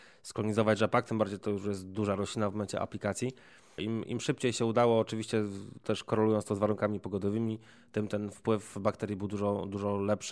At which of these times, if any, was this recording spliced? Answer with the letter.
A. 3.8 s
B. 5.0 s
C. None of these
A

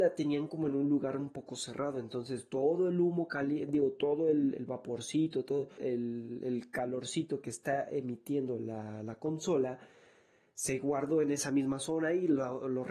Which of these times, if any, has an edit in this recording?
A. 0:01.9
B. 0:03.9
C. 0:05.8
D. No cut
C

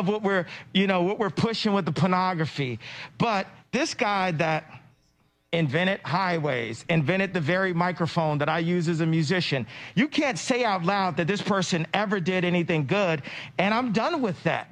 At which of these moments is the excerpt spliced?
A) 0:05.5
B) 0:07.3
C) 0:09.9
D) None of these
D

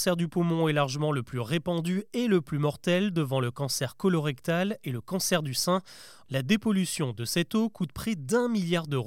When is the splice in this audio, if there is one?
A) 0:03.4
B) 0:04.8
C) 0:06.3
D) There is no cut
C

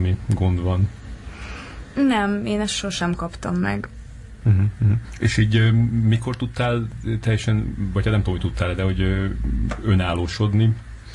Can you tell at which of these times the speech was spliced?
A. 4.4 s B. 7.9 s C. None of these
A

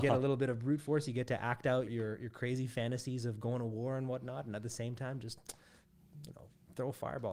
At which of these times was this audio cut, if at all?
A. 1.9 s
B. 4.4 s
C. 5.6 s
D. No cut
A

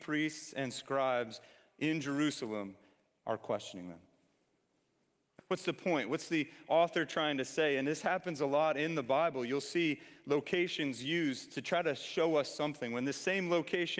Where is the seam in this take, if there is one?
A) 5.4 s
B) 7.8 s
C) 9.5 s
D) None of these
A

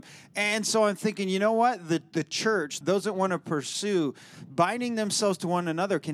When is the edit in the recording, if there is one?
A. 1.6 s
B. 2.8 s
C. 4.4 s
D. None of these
B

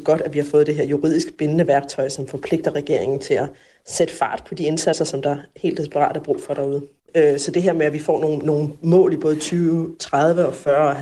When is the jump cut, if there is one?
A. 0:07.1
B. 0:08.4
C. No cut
A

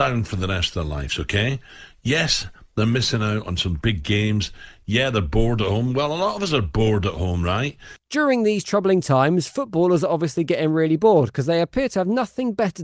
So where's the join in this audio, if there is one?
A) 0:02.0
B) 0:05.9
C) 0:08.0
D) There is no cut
C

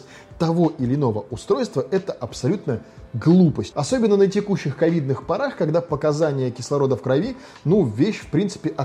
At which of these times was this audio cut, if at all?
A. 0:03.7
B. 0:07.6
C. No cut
A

